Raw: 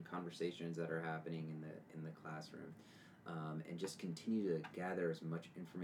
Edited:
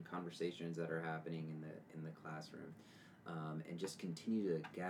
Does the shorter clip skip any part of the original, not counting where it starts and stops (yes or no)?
no